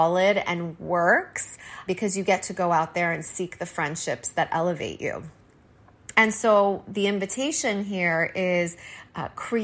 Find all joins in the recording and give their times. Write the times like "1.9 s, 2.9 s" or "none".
1.9 s, 6.1 s